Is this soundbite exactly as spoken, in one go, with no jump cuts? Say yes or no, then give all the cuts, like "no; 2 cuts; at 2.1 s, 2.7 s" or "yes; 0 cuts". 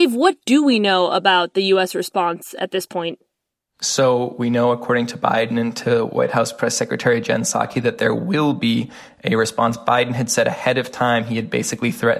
yes; 0 cuts